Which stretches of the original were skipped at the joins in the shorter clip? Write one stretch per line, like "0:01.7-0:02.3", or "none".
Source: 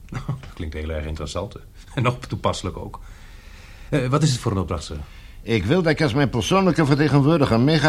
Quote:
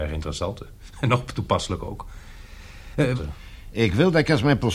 0:04.1-0:04.9